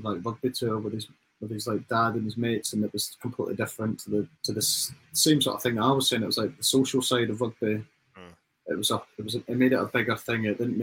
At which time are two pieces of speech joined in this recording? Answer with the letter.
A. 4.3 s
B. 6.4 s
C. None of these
A